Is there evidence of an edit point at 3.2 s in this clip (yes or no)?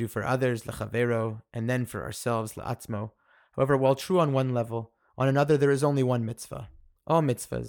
no